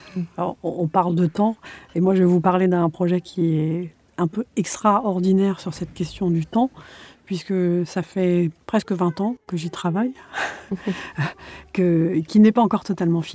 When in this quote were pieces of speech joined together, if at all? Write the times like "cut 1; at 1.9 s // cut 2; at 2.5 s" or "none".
cut 1; at 8.6 s

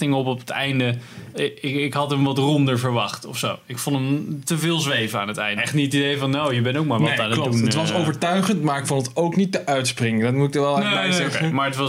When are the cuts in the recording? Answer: cut 1; at 1.3 s // cut 2; at 5.6 s

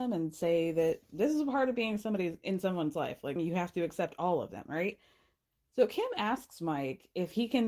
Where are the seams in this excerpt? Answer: cut 1; at 3.4 s

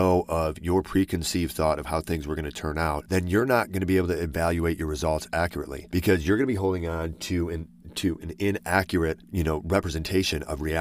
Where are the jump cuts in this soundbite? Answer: none

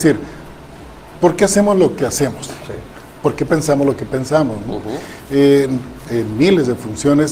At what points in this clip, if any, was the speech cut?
cut 1; at 6.0 s

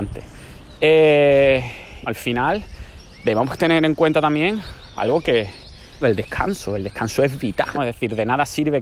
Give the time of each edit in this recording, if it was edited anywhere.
cut 1; at 2.1 s // cut 2; at 6.0 s // cut 3; at 7.7 s

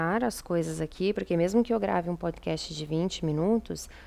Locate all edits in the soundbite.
none

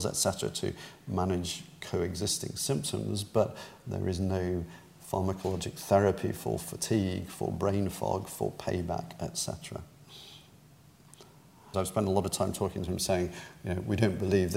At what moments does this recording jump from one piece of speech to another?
cut 1; at 11.7 s

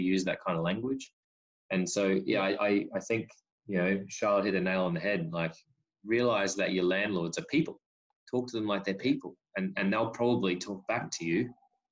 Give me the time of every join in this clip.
none

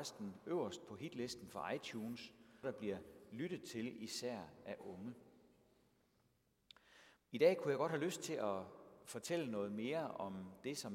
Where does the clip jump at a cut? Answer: cut 1; at 2.6 s // cut 2; at 7.2 s

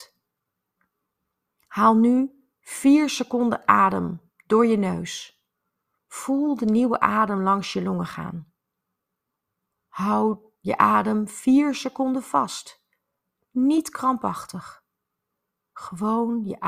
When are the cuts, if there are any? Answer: none

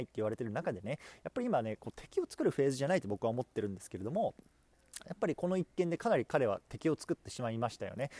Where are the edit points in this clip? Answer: none

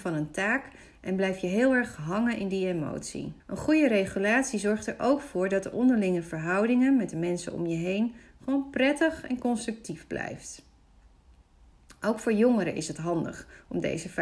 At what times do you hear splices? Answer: cut 1; at 3.4 s

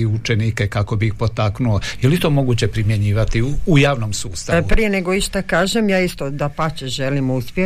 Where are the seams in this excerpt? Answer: none

